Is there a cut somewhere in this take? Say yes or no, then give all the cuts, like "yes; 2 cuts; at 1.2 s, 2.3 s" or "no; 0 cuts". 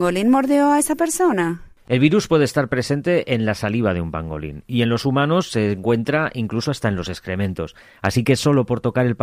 no; 0 cuts